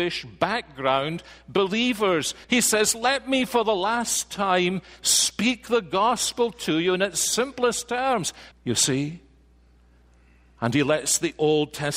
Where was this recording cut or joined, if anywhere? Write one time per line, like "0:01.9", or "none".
0:02.4
0:08.5